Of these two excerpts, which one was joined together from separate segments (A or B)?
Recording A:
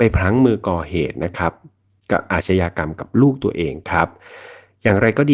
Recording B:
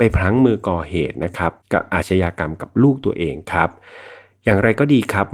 B